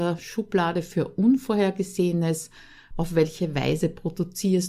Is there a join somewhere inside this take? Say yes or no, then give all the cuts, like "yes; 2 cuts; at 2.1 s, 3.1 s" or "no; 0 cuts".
yes; 1 cut; at 2.9 s